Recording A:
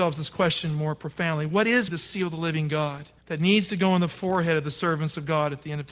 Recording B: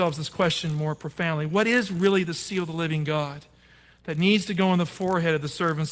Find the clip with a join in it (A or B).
A